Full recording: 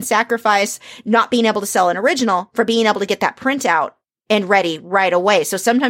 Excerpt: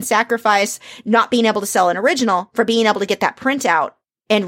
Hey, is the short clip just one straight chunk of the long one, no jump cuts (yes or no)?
yes